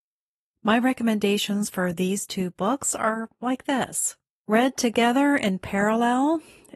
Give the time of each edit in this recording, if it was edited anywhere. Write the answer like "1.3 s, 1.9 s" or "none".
4.3 s